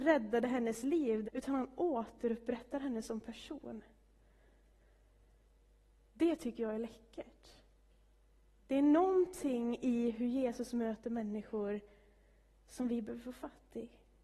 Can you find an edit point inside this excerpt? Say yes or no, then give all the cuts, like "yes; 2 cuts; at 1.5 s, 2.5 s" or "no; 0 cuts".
yes; 1 cut; at 1.2 s